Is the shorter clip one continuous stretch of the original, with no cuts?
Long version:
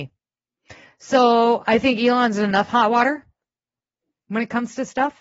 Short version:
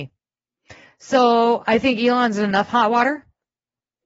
yes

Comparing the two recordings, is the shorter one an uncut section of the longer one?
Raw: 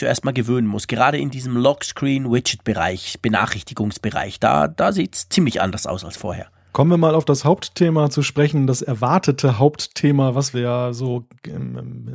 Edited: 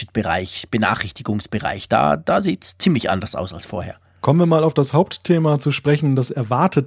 yes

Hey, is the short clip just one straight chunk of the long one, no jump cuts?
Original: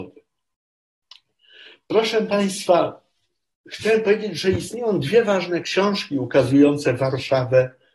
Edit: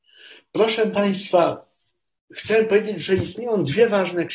yes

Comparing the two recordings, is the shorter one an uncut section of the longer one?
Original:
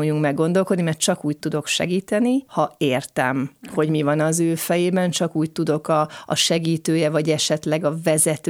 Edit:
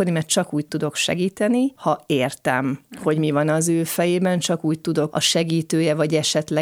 no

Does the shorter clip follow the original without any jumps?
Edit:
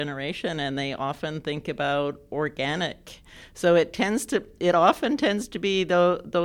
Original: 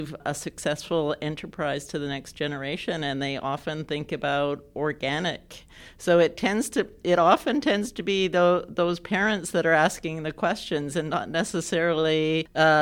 yes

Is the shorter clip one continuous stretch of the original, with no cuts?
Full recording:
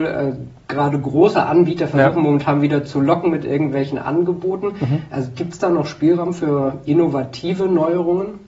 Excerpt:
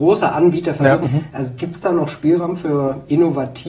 no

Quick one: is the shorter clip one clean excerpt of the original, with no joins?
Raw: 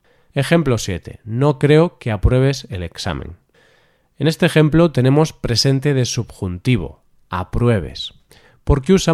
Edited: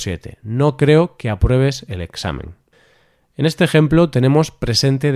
yes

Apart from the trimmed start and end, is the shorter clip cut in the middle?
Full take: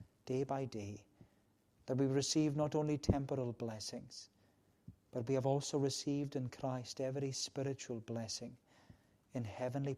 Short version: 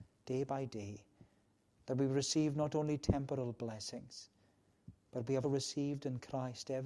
yes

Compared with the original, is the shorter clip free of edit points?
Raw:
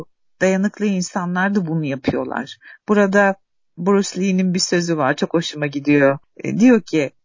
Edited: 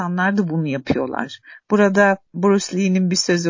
no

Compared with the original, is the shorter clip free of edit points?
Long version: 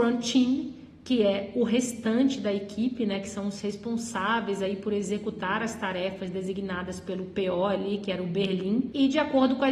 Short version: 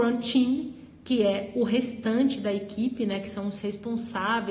yes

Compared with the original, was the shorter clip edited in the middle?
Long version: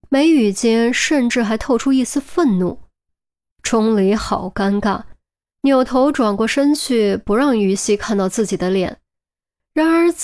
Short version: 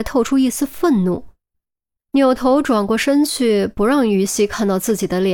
yes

